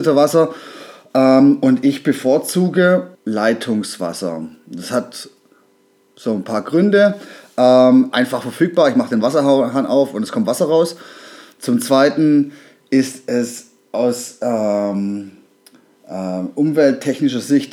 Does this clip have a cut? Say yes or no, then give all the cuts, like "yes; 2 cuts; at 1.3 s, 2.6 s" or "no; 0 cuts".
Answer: yes; 2 cuts; at 3.1 s, 8.1 s